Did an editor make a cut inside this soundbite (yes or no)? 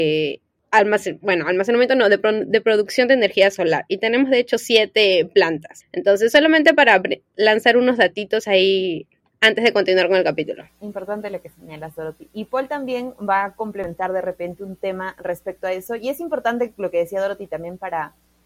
no